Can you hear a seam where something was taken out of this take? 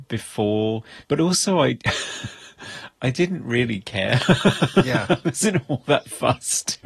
no; 0 cuts

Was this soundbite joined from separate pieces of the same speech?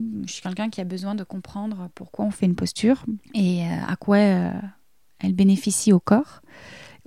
yes; 1 cut; at 3.2 s

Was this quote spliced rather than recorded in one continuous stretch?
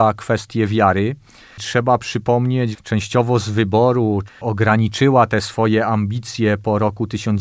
yes; 2 cuts; at 2.7 s, 4.3 s

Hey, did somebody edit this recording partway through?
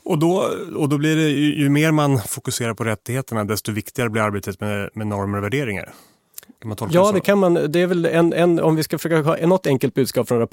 no; 0 cuts

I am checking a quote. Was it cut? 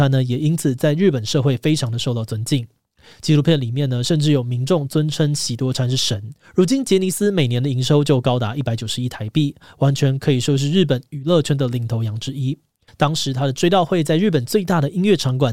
yes; 2 cuts; at 6.4 s, 12.9 s

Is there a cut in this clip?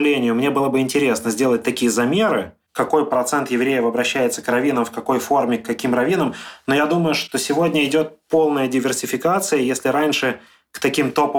no; 0 cuts

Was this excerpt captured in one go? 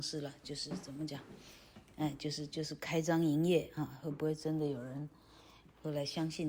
yes; 0 cuts

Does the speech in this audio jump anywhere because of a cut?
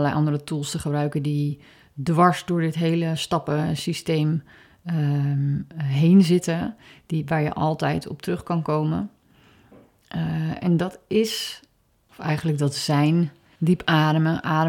no; 0 cuts

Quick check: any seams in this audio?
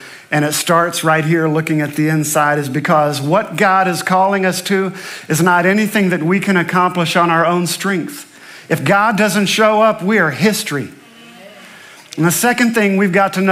no; 0 cuts

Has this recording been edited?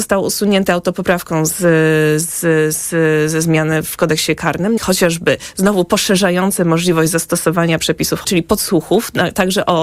yes; 2 cuts; at 4.8 s, 8.2 s

